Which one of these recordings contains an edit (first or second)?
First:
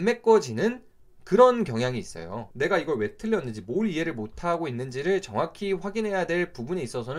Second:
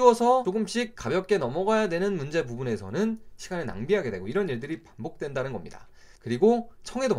second